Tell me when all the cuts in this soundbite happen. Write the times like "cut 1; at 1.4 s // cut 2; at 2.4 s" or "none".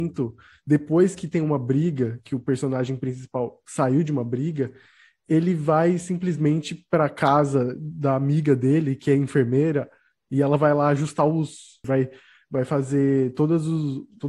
cut 1; at 11.8 s